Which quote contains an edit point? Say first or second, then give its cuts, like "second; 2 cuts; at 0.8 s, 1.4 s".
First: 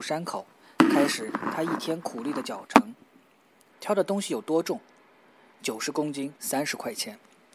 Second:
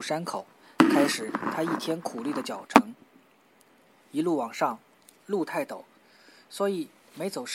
first; 2 cuts; at 3.7 s, 6.3 s